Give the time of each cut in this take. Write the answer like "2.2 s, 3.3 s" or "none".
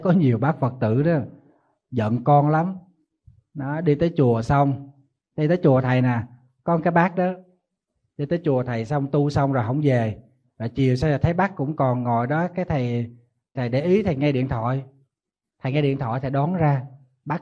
13.5 s